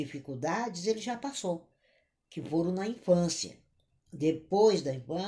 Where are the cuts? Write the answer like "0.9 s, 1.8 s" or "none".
none